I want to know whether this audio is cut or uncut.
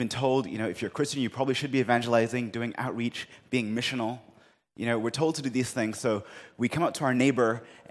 uncut